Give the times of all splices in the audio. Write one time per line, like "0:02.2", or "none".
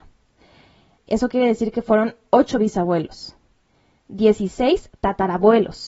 0:01.0